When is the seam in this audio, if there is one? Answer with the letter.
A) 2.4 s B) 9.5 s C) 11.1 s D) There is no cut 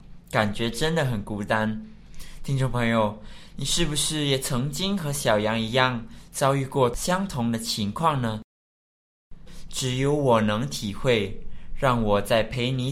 B